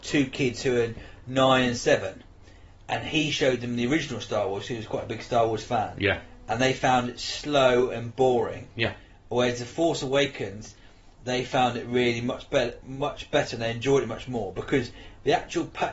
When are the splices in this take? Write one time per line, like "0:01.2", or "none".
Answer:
none

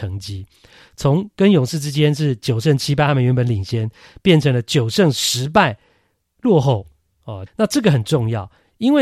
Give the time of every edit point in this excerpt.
0:07.5

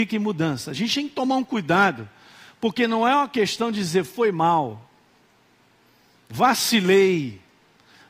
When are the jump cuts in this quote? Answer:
none

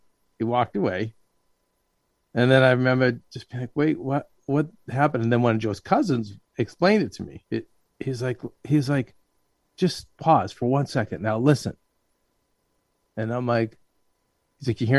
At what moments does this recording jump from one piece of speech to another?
0:07.5

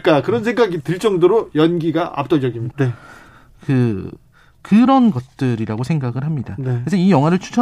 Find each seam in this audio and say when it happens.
0:02.7

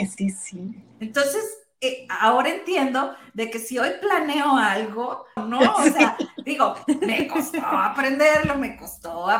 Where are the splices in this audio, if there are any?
0:00.9
0:05.4

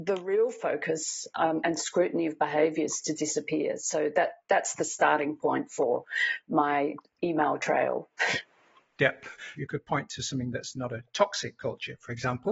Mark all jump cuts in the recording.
0:09.6

